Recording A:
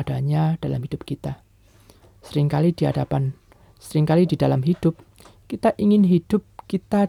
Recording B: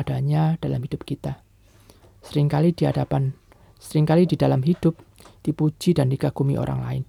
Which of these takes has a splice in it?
B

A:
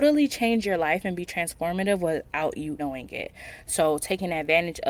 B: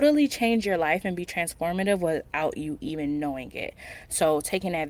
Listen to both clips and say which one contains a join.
A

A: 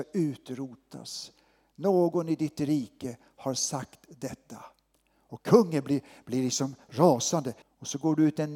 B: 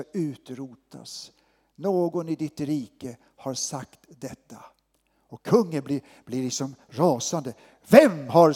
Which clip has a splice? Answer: A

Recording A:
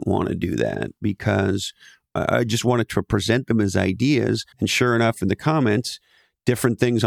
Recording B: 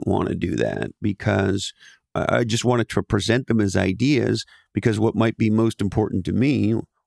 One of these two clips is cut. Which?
A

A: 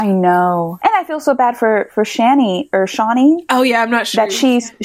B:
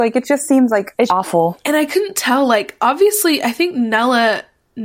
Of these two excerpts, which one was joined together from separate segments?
B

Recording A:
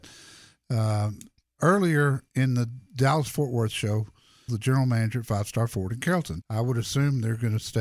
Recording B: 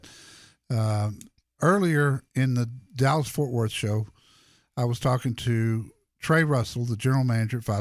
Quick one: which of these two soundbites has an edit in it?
A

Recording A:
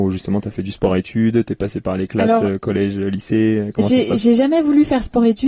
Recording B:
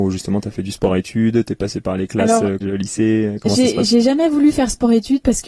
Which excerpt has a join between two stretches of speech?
B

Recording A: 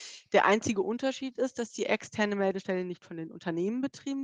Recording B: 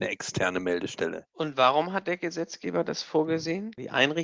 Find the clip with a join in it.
B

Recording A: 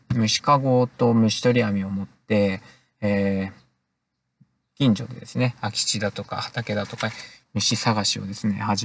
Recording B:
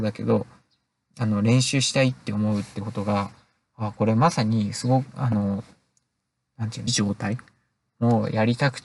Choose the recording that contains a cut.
B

